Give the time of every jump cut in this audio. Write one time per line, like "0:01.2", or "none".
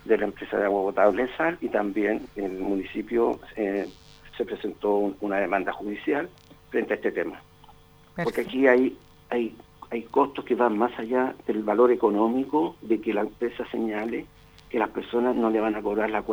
0:04.3